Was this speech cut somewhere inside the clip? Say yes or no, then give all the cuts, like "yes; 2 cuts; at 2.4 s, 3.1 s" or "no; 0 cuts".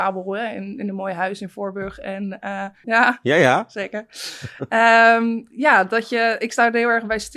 yes; 1 cut; at 2.8 s